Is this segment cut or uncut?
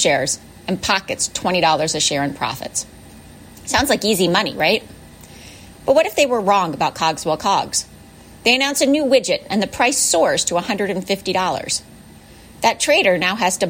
uncut